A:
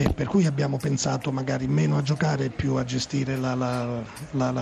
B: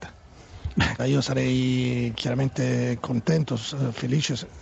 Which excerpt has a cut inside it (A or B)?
B